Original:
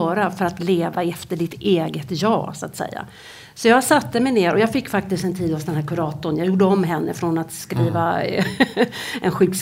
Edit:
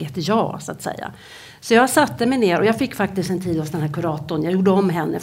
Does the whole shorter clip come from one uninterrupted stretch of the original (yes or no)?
yes